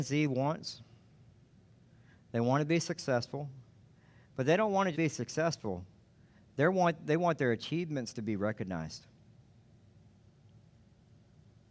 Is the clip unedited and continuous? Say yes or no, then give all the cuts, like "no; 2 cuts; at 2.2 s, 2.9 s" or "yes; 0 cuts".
no; 1 cut; at 4.9 s